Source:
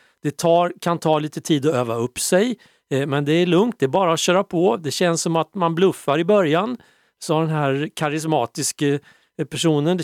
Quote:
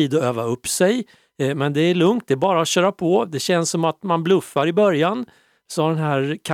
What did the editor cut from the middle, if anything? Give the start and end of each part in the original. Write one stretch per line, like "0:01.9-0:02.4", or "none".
none